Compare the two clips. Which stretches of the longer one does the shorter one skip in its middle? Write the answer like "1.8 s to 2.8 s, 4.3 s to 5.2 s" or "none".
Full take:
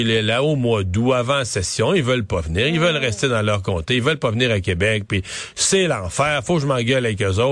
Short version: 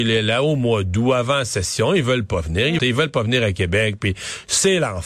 2.8 s to 3.9 s